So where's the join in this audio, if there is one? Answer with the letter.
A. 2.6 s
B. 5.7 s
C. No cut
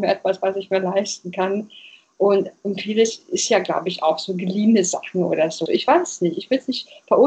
B